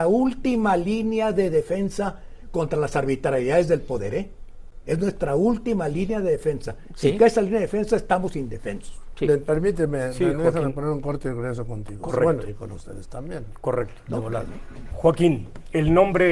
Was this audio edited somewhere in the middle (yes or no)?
no